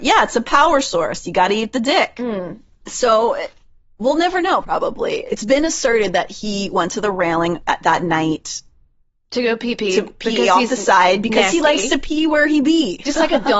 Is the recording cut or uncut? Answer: uncut